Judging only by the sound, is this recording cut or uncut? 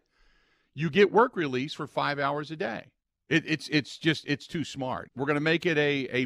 cut